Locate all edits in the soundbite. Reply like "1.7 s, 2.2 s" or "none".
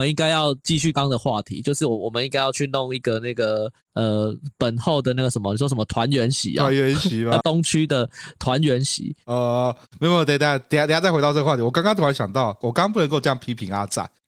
0.9 s, 7.4 s, 12.6 s